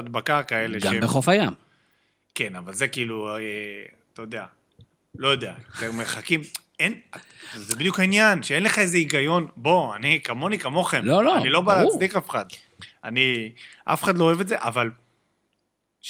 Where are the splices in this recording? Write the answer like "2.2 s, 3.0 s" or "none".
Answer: none